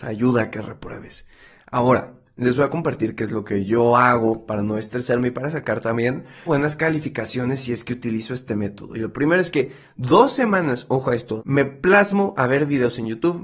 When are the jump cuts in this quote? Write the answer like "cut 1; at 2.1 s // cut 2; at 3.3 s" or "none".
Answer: cut 1; at 6.5 s // cut 2; at 11.4 s